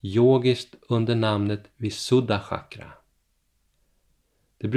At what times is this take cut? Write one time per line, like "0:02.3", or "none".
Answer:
none